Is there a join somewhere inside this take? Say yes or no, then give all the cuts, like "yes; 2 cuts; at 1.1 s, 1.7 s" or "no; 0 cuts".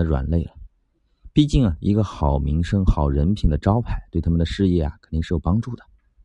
no; 0 cuts